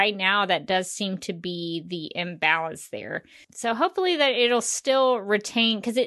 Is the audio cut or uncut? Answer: cut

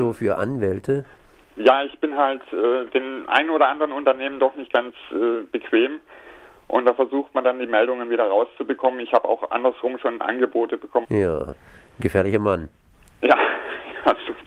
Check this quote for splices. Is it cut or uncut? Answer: cut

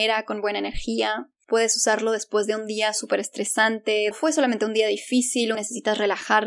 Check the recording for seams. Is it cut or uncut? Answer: cut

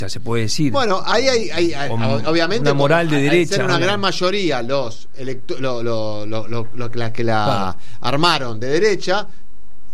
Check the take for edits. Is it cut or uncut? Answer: uncut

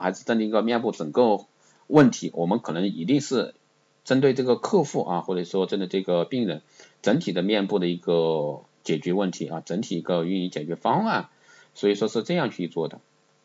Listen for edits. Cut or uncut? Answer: uncut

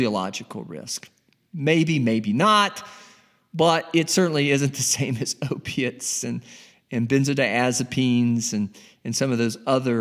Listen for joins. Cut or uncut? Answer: uncut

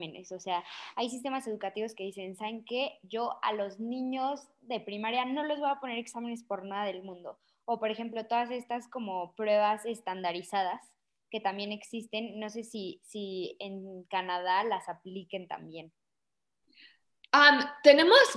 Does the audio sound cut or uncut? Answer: uncut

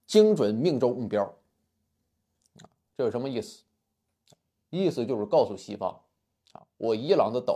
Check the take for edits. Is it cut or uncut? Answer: uncut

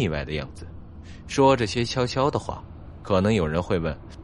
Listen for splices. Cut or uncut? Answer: uncut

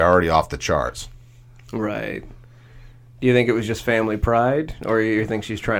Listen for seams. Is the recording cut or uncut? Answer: uncut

